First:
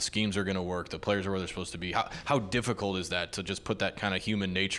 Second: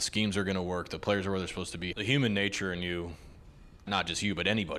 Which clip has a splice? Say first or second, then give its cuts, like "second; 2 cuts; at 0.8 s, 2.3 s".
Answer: second; 2 cuts; at 1.9 s, 3.9 s